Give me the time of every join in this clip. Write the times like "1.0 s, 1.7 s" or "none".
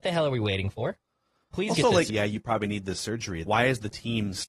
2.1 s, 3.5 s

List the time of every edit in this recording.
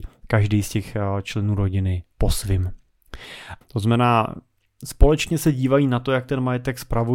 3.6 s

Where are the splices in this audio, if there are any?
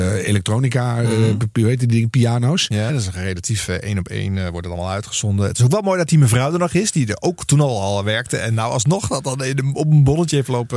2.9 s

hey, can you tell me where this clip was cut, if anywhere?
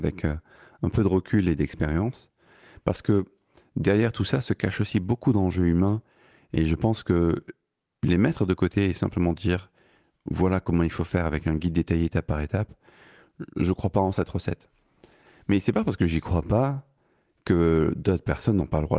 none

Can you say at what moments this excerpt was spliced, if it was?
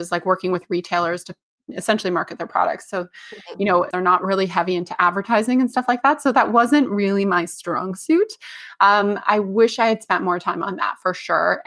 3.9 s

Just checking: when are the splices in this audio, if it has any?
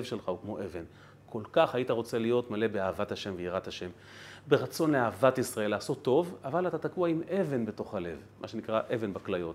none

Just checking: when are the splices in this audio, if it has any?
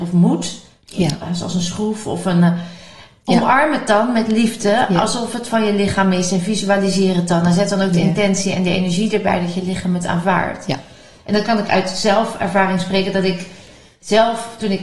none

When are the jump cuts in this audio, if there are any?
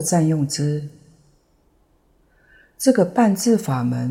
none

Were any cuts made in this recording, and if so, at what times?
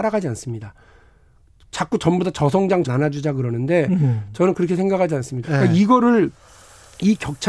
2.8 s, 5.4 s

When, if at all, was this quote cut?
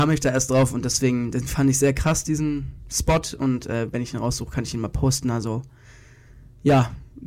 none

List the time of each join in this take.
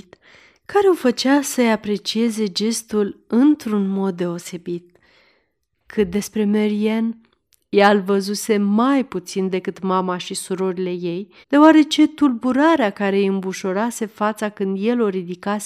5.7 s, 11.4 s

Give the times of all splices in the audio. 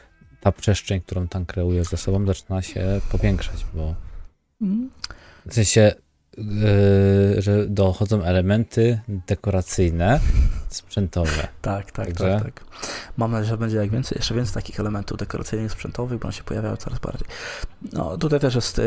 none

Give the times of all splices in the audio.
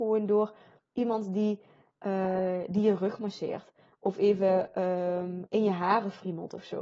none

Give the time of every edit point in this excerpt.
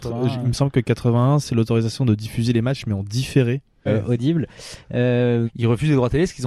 3.9 s, 5.5 s

